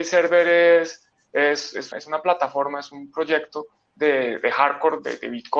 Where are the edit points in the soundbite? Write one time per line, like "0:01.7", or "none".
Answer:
0:01.9